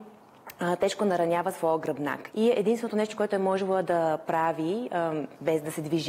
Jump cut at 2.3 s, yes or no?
yes